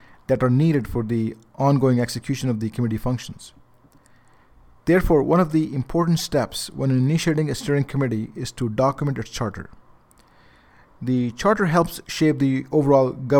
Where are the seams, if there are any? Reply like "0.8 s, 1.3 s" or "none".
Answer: none